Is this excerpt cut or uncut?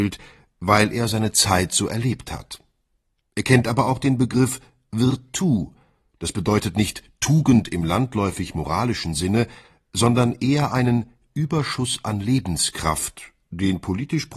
uncut